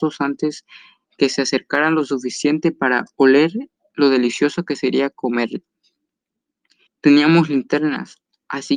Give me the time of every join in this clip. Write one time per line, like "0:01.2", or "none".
0:06.9